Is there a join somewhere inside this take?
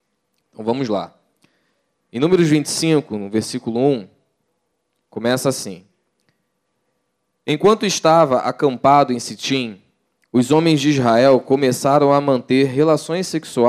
no; 0 cuts

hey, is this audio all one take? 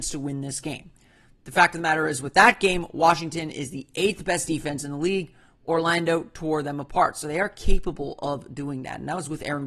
yes; 0 cuts

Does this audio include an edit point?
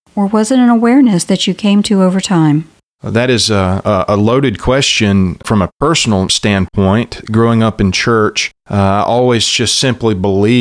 no; 0 cuts

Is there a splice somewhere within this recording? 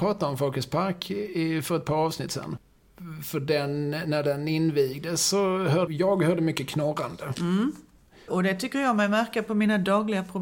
yes; 2 cuts; at 5.9 s, 8.3 s

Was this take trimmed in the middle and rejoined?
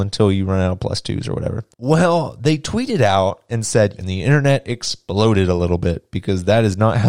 yes; 2 cuts; at 1.7 s, 4.0 s

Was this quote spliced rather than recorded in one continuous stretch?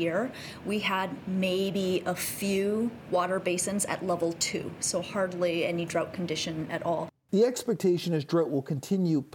no; 0 cuts

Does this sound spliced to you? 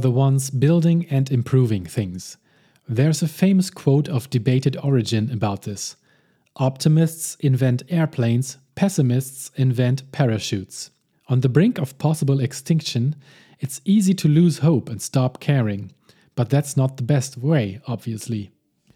yes; 1 cut; at 11.1 s

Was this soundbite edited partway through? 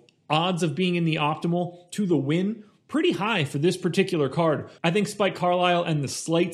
yes; 1 cut; at 4.8 s

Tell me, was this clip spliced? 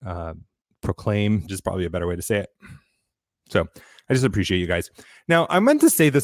yes; 1 cut; at 1.5 s

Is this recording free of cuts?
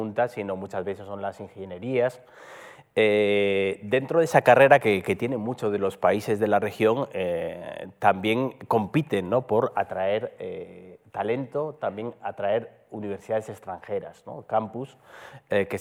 yes; 0 cuts

